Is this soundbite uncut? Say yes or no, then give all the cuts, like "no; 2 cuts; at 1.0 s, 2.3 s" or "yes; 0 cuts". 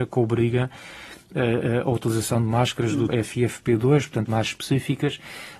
no; 2 cuts; at 3.1 s, 4.3 s